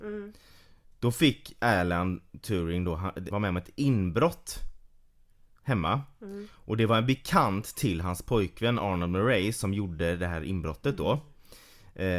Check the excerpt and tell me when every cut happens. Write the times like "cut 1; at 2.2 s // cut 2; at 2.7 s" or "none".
cut 1; at 3.3 s